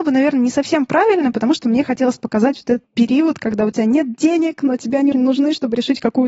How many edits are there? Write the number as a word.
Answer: two